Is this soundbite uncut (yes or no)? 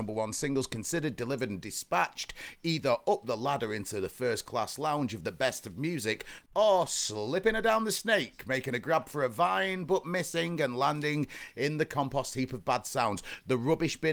no